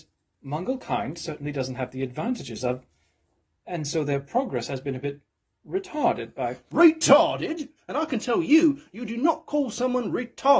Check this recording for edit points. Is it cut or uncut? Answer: cut